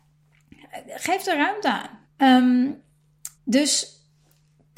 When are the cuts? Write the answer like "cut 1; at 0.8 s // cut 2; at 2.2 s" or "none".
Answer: cut 1; at 2.0 s // cut 2; at 3.3 s